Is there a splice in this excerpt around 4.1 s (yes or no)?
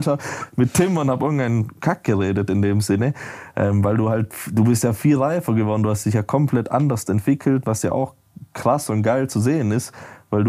no